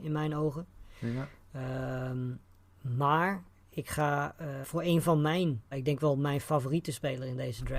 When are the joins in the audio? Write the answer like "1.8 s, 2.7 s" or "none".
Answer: 4.6 s, 5.7 s